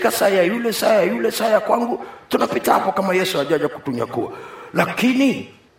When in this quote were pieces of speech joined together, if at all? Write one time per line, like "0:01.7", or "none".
none